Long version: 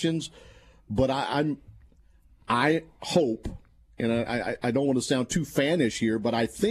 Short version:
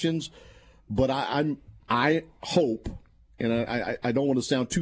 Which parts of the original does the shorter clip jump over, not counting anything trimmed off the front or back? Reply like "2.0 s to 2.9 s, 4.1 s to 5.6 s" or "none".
1.8 s to 2.4 s